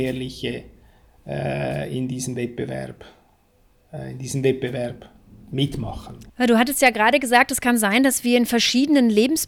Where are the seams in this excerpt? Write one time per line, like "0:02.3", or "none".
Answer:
0:06.3